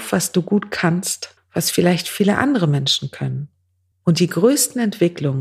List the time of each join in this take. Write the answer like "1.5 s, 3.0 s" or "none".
1.4 s, 3.9 s